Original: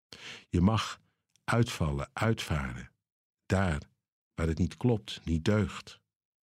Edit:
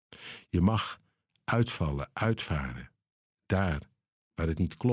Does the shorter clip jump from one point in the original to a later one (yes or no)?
no